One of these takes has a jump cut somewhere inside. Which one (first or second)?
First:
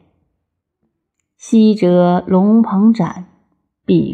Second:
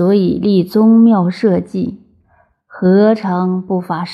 second